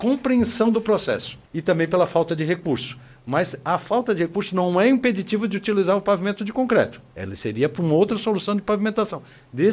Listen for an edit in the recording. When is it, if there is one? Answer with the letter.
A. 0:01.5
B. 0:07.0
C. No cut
A